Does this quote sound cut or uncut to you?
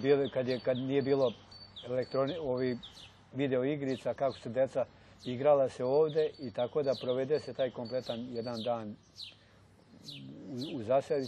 cut